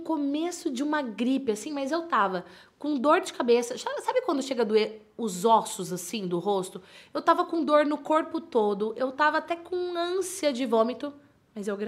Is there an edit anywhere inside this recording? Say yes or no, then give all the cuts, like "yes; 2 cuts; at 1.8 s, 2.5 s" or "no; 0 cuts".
no; 0 cuts